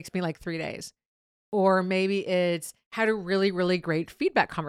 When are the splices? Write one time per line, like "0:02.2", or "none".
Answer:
none